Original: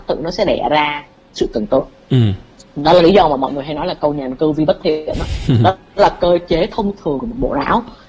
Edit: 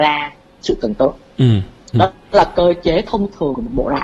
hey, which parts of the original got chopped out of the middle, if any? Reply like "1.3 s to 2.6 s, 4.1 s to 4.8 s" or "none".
2.7 s to 5.6 s